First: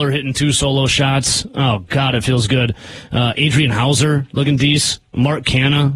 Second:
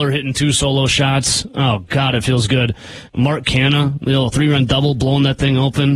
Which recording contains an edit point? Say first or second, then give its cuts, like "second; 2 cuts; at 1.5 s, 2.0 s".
second; 1 cut; at 3.1 s